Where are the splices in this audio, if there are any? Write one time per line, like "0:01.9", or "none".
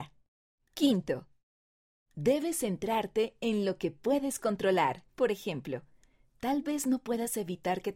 0:05.1

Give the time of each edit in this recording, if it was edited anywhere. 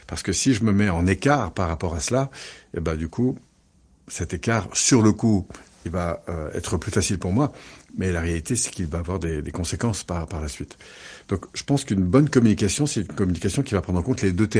none

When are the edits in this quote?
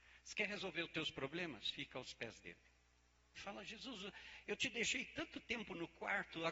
0:03.4

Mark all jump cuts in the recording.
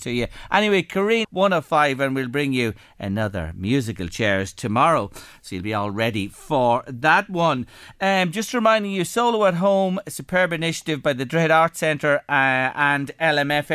0:01.2

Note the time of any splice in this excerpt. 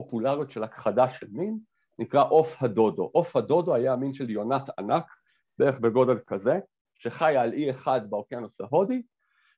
none

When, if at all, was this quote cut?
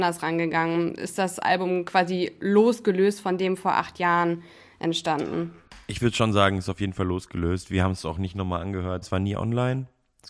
0:09.0

